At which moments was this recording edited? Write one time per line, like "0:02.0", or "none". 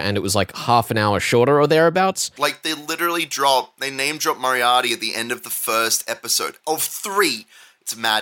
0:02.4